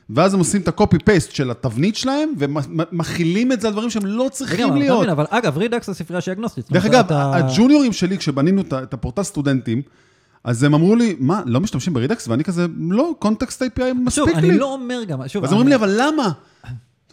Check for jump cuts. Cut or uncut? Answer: uncut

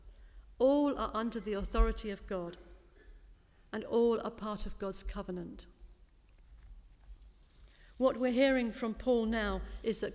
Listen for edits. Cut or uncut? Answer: uncut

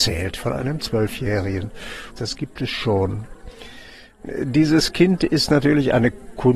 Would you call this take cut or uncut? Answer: cut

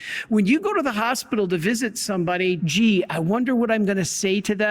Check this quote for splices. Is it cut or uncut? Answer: cut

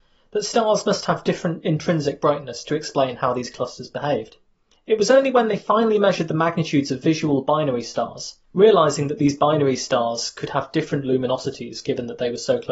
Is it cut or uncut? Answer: cut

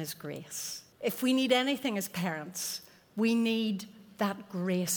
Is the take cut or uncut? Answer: cut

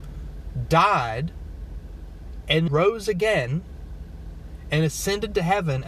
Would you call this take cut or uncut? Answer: cut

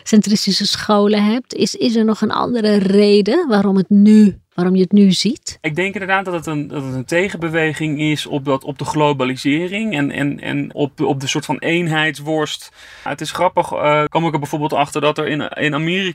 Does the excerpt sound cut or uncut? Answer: cut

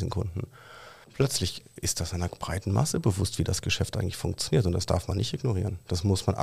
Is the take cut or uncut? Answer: cut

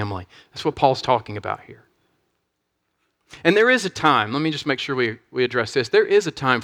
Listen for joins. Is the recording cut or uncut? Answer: uncut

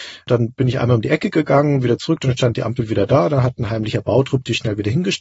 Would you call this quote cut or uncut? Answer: uncut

